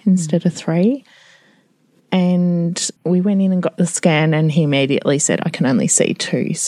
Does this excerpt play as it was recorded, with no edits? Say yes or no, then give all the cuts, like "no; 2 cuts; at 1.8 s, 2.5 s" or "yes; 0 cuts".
no; 1 cut; at 3.0 s